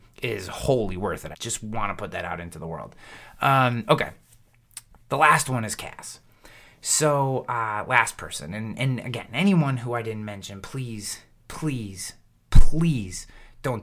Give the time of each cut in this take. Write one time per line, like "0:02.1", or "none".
0:01.3